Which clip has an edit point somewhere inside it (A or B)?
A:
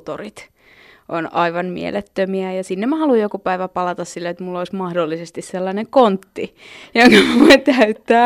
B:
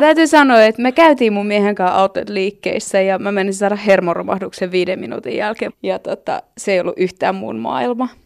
B